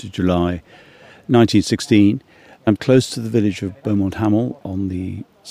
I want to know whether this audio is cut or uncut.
uncut